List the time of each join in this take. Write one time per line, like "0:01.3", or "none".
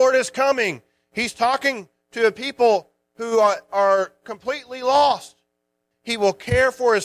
0:05.9